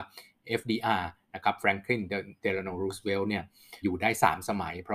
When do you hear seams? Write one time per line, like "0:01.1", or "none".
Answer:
0:03.8

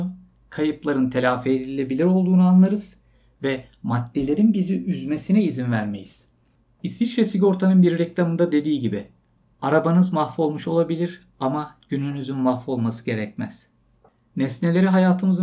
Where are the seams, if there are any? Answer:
none

